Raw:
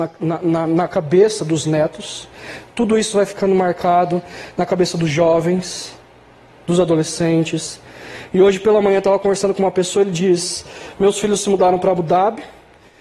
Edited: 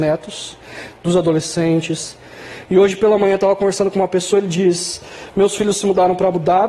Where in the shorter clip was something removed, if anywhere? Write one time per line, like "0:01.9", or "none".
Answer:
0:01.0